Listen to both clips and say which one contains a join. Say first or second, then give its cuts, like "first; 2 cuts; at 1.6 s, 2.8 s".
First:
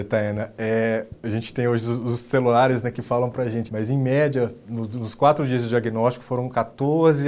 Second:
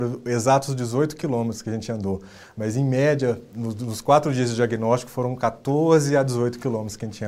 first; 1 cut; at 3.7 s